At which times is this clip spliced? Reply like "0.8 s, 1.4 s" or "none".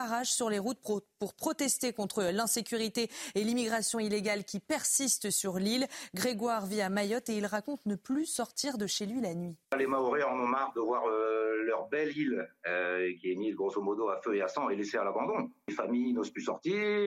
9.6 s